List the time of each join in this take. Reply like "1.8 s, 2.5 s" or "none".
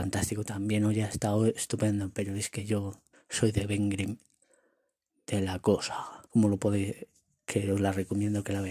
3.1 s, 6.3 s